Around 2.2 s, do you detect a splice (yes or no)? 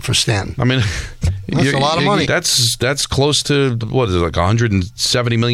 yes